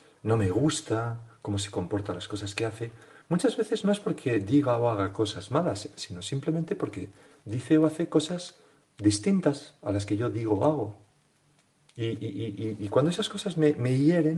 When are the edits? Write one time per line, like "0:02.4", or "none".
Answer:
none